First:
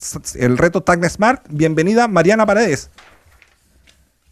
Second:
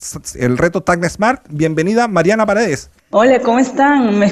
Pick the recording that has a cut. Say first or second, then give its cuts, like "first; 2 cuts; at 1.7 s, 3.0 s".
second; 1 cut; at 3.0 s